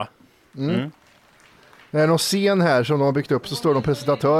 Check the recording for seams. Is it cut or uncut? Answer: uncut